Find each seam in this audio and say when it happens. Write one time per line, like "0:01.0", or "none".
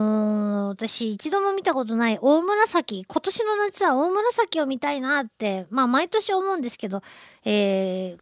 none